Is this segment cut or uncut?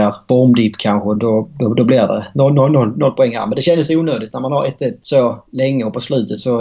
cut